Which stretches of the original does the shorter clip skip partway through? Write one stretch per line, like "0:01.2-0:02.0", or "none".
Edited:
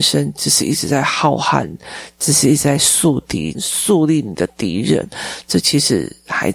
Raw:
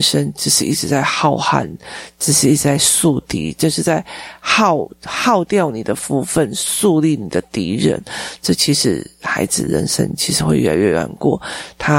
0:03.5-0:06.5